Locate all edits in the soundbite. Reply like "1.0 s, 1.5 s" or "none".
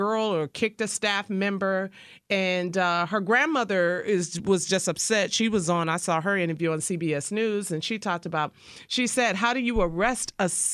none